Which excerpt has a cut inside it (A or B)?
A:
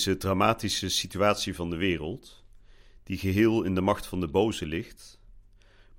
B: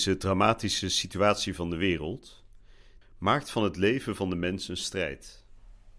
B